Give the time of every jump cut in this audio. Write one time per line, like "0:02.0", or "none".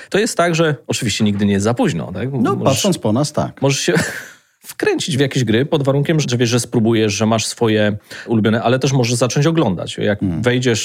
0:06.2